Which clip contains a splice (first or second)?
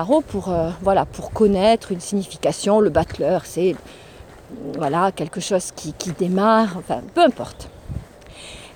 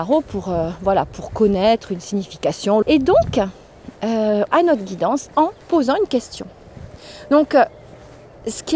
second